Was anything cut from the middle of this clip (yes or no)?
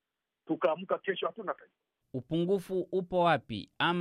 yes